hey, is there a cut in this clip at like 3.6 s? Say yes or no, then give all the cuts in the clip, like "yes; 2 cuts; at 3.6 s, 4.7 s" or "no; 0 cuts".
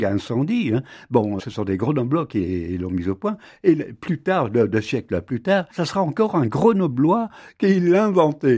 no; 2 cuts; at 1.4 s, 5.7 s